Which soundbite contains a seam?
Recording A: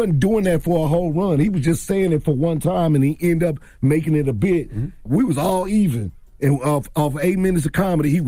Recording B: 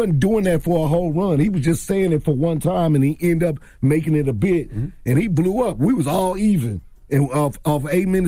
A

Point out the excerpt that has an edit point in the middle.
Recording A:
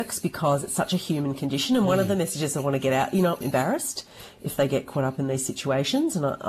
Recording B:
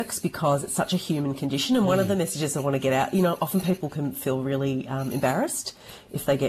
A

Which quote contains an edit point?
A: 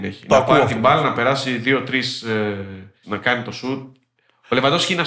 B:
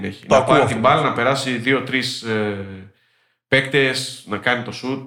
A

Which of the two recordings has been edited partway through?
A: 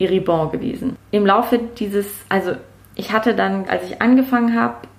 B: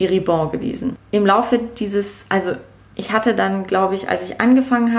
A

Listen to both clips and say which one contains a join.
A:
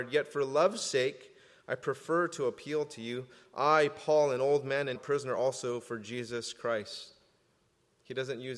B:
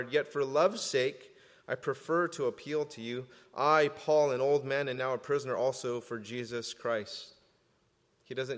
A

